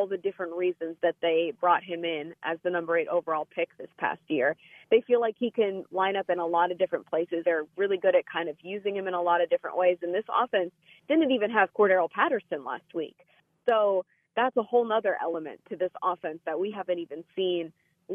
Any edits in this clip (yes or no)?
yes